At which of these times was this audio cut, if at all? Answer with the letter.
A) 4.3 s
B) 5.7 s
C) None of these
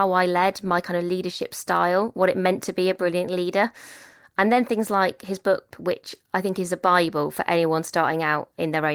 B